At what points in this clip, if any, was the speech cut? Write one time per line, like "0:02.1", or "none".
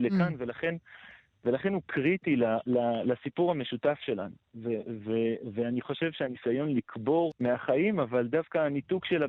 0:07.3